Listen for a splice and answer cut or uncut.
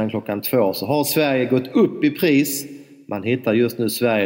uncut